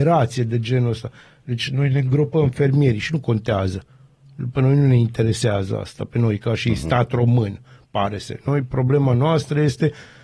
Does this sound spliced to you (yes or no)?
no